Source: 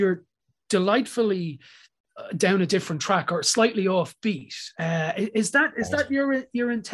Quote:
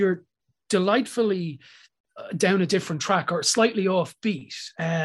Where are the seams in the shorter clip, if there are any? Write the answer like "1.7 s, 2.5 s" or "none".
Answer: none